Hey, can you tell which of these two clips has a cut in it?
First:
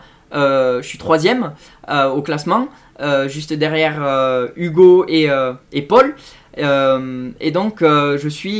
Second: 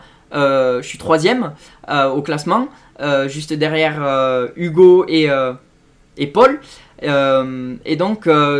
first; 1 cut; at 5.6 s

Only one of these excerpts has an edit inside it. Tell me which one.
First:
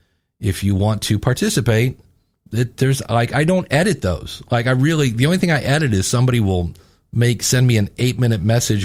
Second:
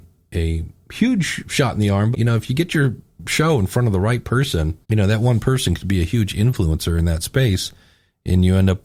second; 2 cuts; at 2.1 s, 4.8 s

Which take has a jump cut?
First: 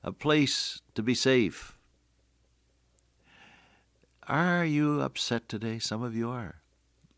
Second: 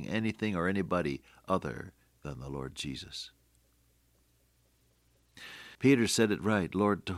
second; 1 cut; at 5.7 s

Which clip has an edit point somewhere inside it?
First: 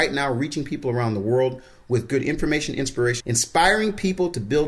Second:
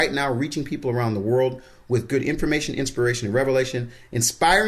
first; 1 cut; at 3.2 s

